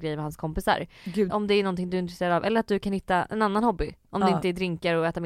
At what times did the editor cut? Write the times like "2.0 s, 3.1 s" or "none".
1.3 s